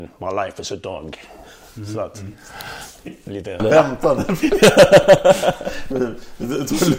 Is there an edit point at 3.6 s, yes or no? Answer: yes